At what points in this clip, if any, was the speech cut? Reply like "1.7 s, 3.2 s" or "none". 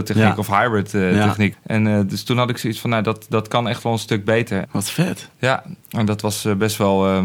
1.5 s, 4.6 s